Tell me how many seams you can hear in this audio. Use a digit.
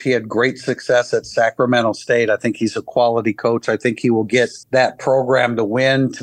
1